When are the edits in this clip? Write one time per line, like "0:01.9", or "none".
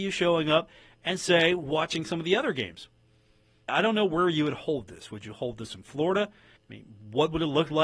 0:03.7
0:06.6